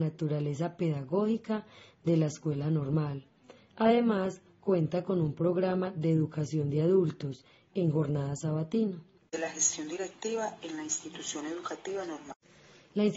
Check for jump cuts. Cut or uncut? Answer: cut